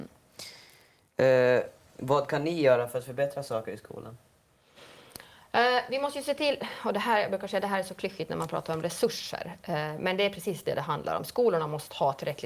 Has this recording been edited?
no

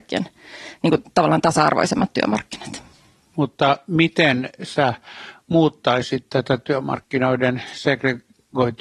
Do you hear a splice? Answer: no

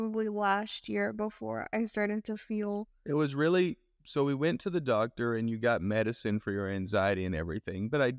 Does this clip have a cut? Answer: no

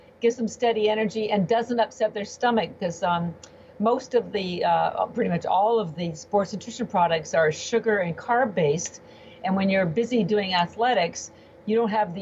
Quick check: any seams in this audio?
no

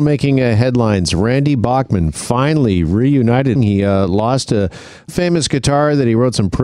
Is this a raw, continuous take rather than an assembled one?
no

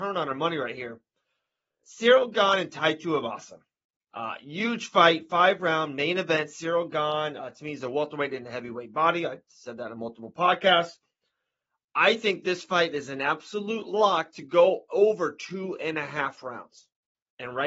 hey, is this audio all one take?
yes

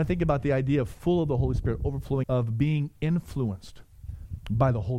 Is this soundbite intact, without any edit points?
no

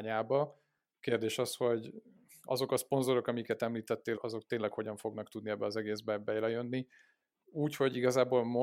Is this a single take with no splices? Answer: no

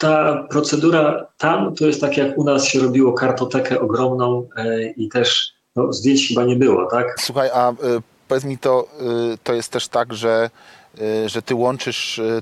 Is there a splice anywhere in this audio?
yes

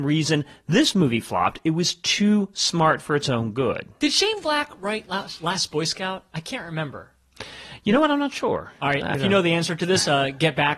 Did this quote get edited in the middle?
yes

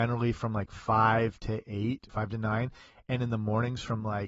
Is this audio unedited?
no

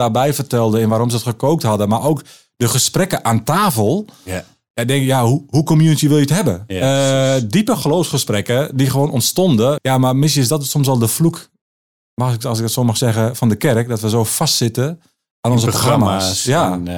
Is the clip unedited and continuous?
no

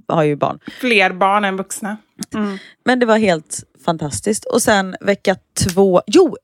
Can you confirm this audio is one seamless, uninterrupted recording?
no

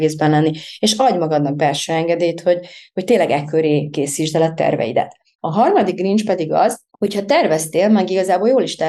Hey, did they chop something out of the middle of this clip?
yes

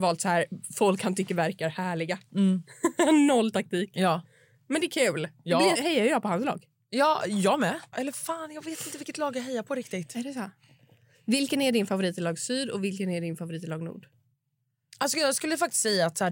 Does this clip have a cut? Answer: yes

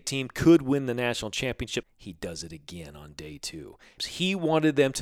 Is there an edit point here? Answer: yes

